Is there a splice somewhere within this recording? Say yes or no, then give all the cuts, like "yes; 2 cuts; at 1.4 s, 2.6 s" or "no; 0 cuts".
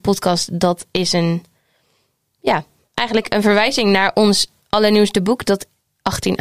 no; 0 cuts